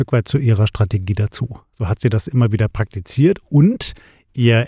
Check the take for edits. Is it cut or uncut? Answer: uncut